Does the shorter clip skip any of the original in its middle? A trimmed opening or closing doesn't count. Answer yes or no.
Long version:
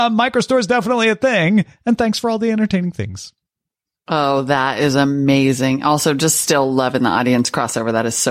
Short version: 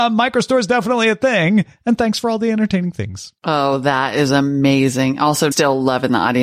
yes